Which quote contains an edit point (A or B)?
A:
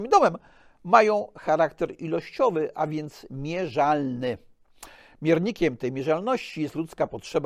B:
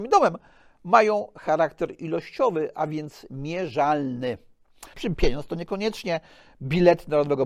B